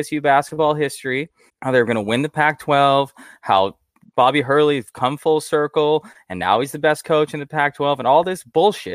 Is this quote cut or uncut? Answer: cut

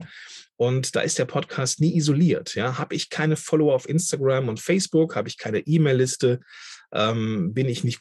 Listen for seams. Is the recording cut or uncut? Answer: uncut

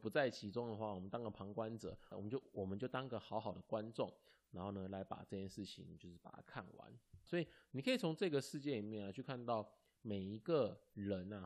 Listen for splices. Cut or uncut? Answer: cut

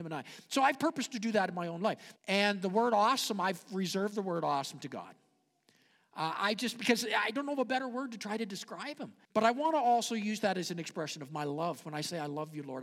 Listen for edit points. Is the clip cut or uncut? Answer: cut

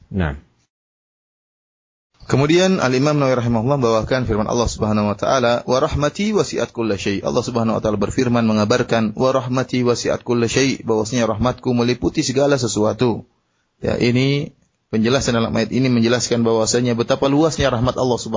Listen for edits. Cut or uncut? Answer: uncut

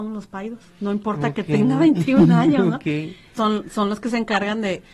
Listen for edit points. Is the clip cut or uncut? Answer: cut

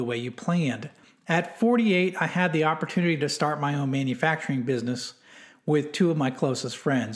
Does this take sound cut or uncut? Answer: uncut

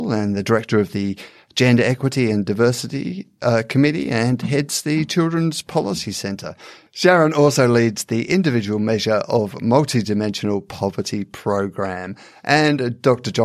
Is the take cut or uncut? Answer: uncut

